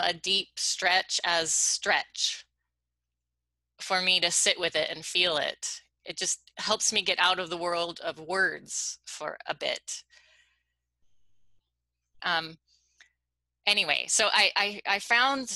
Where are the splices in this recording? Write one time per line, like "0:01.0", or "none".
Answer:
0:12.2